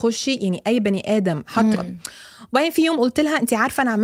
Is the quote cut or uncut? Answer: cut